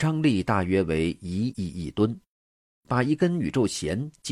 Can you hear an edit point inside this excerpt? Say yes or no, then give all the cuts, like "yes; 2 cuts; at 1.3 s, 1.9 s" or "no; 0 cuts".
yes; 1 cut; at 1.5 s